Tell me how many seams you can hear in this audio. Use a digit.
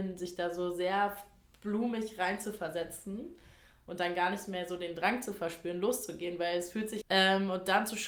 1